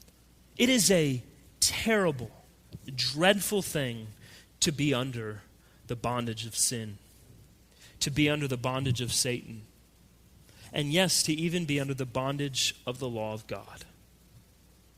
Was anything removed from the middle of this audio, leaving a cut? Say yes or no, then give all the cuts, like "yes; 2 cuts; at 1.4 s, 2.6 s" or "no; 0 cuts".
no; 0 cuts